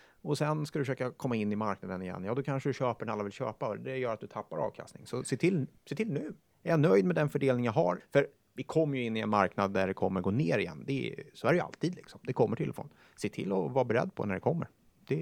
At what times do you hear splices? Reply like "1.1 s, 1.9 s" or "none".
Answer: 6.5 s, 8.0 s